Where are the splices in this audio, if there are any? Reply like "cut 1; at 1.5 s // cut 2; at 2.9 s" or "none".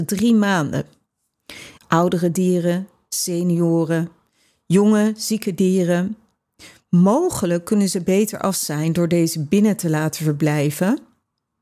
cut 1; at 1.8 s